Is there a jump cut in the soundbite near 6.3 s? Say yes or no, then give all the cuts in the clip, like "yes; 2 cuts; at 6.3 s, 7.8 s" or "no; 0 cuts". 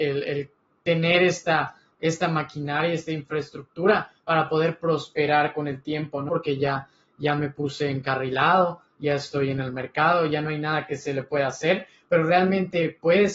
yes; 1 cut; at 6.3 s